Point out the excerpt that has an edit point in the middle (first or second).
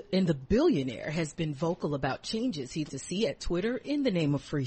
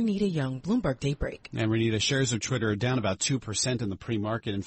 first